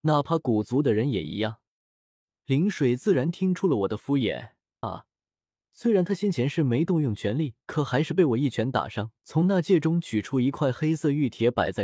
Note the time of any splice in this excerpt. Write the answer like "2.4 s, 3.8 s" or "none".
4.8 s, 7.6 s, 9.2 s